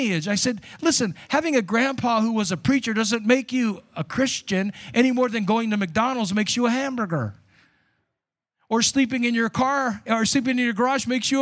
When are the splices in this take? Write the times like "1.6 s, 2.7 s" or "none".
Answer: none